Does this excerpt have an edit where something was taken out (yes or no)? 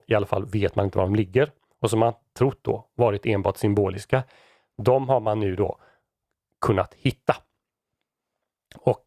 no